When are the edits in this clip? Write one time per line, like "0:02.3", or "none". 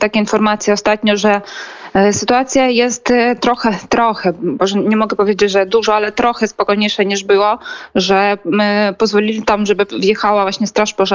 none